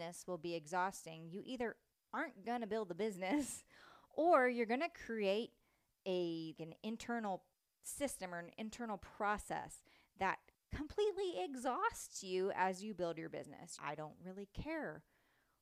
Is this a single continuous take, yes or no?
no